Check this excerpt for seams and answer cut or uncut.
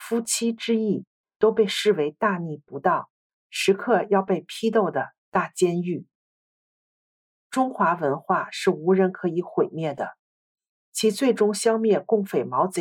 cut